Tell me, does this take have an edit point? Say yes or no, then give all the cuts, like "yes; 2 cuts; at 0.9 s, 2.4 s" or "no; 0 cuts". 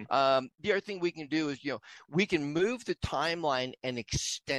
no; 0 cuts